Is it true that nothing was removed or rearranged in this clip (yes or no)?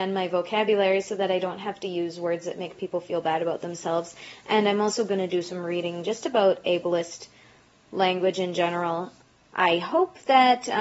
yes